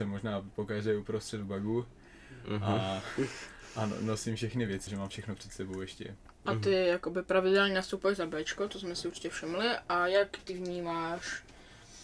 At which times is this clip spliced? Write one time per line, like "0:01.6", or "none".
0:04.9

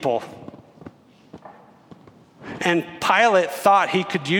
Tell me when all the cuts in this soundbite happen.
0:02.6

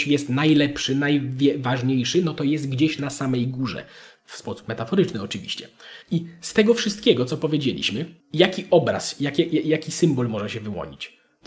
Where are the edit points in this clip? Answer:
0:06.0
0:08.2

